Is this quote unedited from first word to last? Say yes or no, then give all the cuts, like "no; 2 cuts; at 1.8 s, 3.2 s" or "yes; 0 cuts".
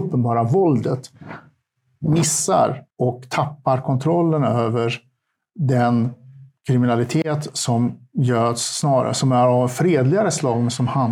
no; 1 cut; at 2.9 s